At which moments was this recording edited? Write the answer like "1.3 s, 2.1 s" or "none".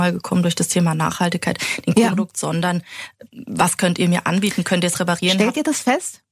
2.1 s